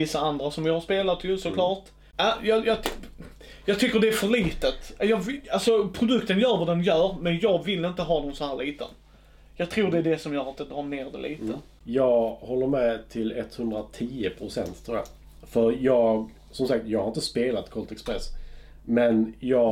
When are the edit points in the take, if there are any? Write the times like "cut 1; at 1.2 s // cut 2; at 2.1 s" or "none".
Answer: none